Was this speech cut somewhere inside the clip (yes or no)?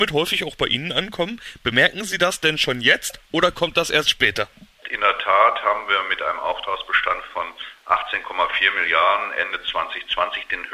yes